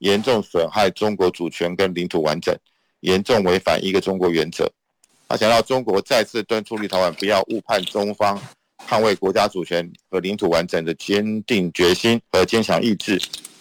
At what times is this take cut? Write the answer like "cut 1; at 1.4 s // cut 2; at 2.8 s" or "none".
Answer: cut 1; at 5.1 s // cut 2; at 12.3 s